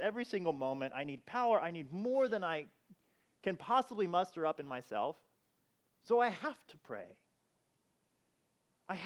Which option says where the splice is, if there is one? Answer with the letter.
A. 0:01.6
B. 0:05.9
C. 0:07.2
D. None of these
D